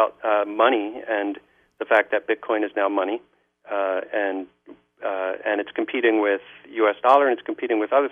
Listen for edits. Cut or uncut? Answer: uncut